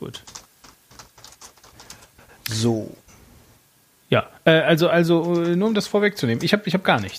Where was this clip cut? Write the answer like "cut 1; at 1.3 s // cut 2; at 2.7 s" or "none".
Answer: none